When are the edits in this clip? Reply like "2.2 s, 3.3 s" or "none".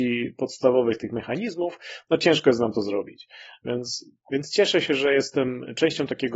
4.2 s

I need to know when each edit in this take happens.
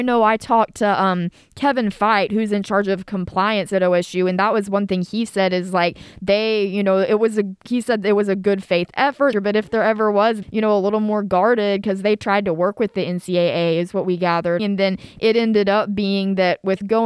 9.3 s, 10.4 s, 14.6 s

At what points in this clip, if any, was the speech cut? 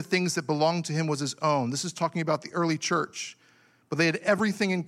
none

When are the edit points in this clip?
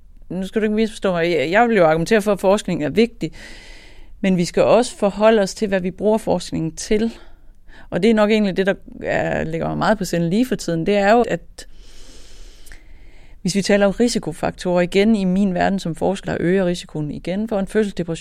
11.2 s, 16.2 s

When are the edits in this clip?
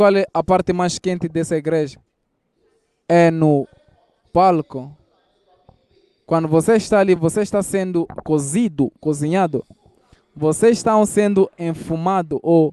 none

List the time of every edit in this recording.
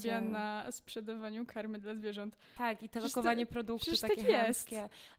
2.6 s

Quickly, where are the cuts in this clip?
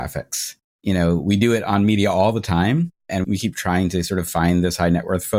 none

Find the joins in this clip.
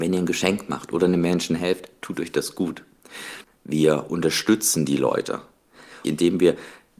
3.4 s, 6.0 s

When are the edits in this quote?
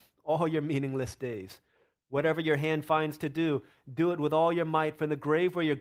2.0 s

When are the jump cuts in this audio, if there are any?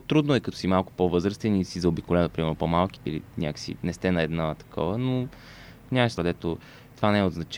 3.0 s, 6.2 s

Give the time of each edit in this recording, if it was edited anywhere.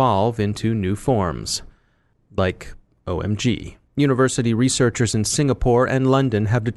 3.8 s

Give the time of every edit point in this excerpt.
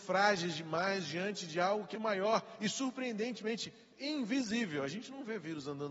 1.9 s

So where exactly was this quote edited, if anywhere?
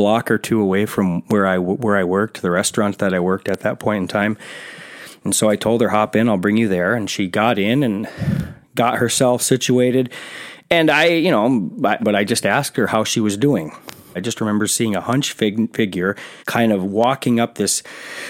12.0 s, 14.2 s, 16.4 s

